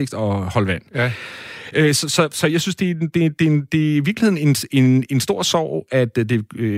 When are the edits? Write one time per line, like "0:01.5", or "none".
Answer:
none